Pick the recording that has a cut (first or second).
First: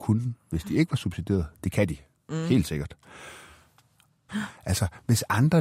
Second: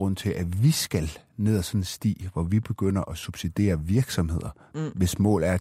first